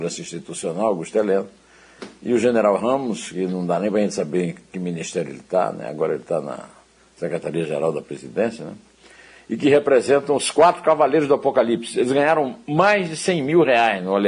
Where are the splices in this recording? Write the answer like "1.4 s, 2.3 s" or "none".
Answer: none